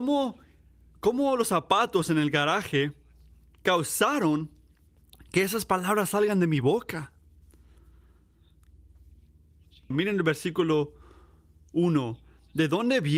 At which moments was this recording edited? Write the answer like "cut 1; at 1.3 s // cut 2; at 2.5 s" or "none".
cut 1; at 9.9 s

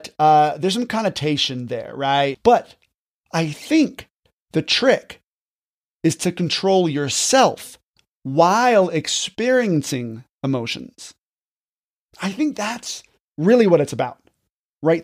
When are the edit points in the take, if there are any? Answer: cut 1; at 2.3 s

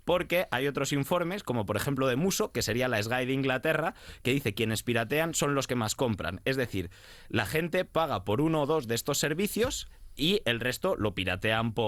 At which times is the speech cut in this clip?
none

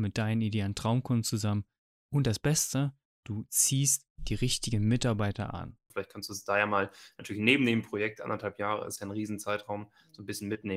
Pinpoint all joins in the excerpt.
cut 1; at 5.9 s

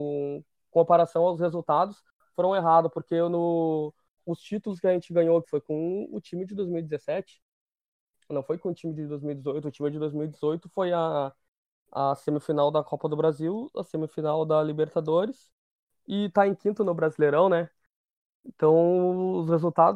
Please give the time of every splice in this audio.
cut 1; at 4.2 s // cut 2; at 5.4 s

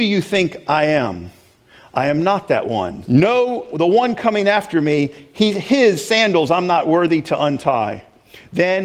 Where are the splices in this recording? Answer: cut 1; at 3.1 s

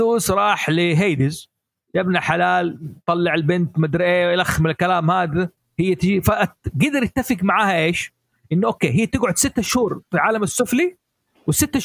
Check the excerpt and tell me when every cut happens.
none

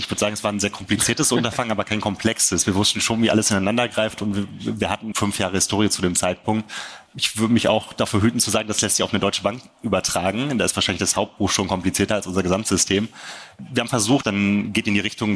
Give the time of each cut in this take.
cut 1; at 5.1 s // cut 2; at 14.2 s

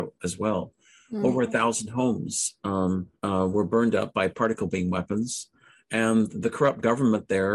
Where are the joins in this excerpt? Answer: cut 1; at 3.2 s

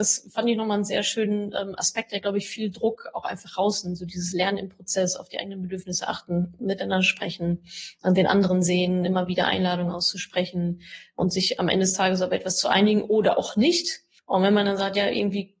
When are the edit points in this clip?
none

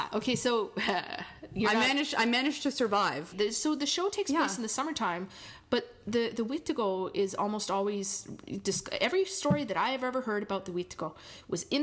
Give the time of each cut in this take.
cut 1; at 3.3 s

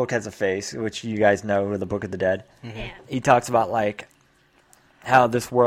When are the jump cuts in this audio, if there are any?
cut 1; at 3.0 s

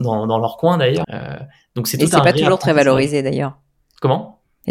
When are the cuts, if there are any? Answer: cut 1; at 1.0 s

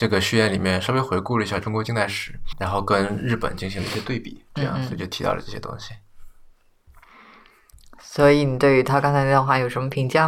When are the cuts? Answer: cut 1; at 2.5 s

